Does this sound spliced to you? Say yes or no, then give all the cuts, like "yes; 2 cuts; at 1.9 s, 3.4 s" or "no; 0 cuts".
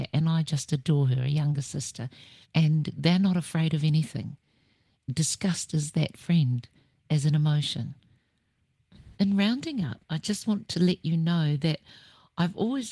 yes; 1 cut; at 2.4 s